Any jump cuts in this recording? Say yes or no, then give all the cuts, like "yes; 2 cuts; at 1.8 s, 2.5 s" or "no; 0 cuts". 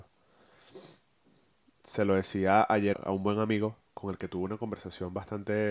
yes; 1 cut; at 2.9 s